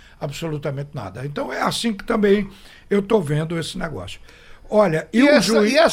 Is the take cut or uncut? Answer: uncut